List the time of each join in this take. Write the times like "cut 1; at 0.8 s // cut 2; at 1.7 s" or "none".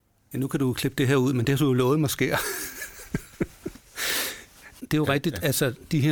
none